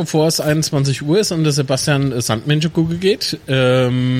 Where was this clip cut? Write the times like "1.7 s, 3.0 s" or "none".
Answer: none